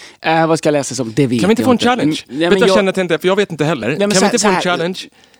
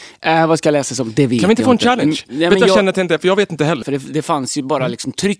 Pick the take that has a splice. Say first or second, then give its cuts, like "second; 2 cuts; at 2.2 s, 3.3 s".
second; 1 cut; at 3.8 s